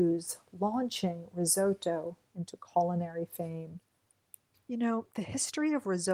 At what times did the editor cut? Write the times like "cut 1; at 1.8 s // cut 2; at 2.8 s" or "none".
none

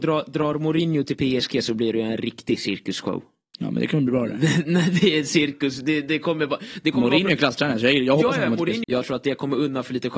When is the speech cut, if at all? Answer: cut 1; at 8.8 s

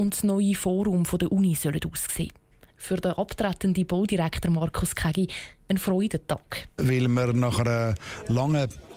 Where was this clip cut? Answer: none

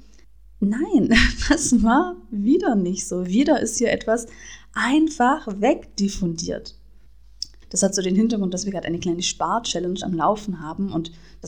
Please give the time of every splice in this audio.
cut 1; at 7.6 s

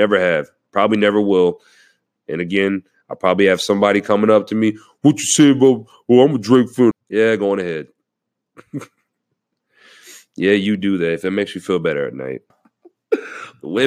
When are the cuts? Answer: cut 1; at 6.9 s // cut 2; at 12.5 s

